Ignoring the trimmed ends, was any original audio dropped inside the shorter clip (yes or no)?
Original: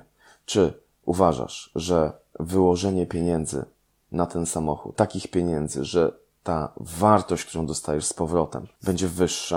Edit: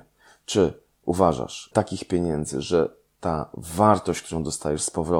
yes